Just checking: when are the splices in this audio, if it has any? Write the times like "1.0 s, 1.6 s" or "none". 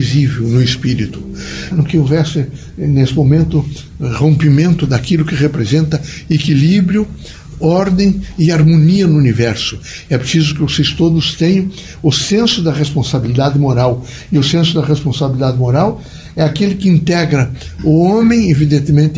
1.7 s